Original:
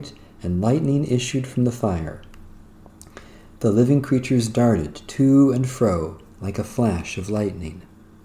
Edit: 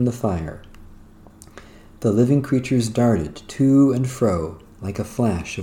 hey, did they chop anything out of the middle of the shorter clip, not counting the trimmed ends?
no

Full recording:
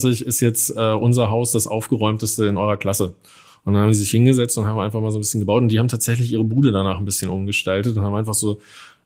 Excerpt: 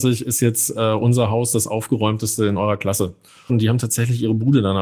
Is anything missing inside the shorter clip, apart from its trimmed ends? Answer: yes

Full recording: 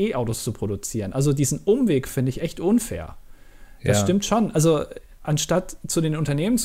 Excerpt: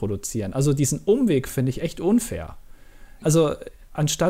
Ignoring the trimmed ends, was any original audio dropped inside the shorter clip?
yes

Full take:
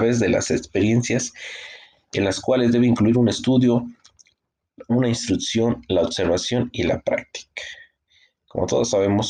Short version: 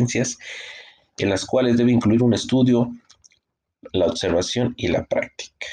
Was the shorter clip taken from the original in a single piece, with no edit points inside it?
no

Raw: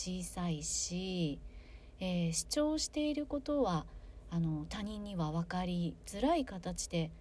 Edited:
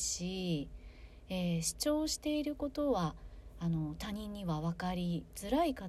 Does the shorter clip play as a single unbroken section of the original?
yes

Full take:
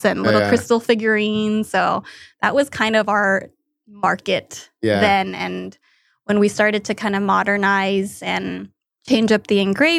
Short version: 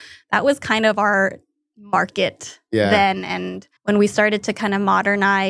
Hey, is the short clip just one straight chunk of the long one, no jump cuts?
no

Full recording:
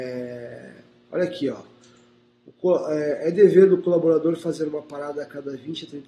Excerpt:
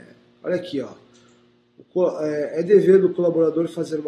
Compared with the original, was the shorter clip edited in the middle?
no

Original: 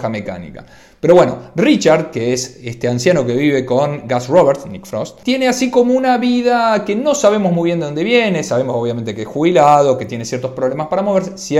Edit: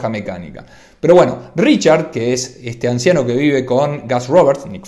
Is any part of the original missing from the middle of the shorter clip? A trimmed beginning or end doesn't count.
no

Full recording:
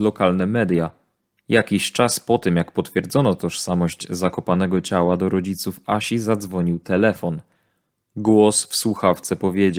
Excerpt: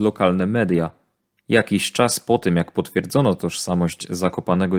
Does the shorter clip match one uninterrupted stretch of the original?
yes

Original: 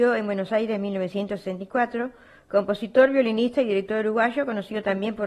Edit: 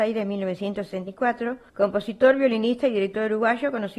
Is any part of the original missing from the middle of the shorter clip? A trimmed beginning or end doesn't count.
yes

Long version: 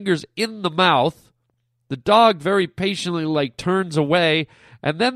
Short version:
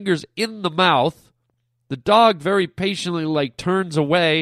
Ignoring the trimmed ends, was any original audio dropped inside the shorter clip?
no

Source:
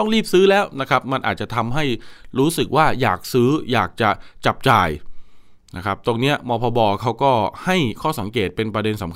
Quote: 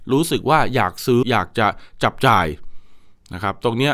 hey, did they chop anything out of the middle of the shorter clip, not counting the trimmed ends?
yes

